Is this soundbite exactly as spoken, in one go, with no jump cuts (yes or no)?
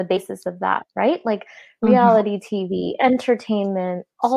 yes